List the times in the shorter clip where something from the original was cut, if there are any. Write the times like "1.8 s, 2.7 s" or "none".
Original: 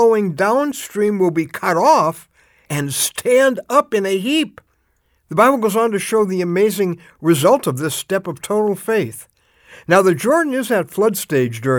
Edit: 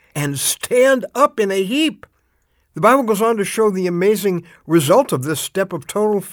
none